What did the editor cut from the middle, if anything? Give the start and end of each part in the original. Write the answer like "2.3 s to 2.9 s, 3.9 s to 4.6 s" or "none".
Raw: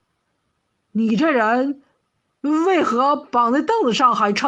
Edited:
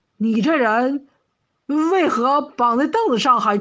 none

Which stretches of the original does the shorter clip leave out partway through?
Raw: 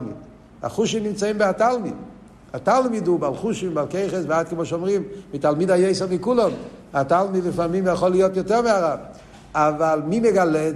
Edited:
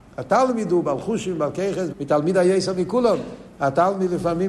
4.3 s to 5.2 s

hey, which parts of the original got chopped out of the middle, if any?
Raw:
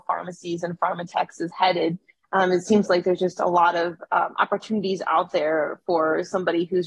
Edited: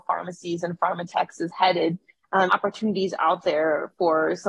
2.5 s to 4.3 s

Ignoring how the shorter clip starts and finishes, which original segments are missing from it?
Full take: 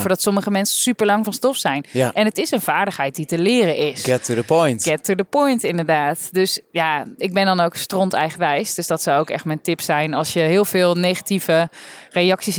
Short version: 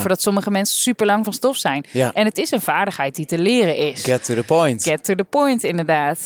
none

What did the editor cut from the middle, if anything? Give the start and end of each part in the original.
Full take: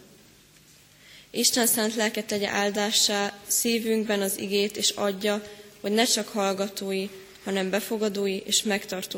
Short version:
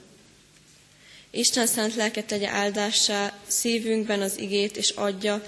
none

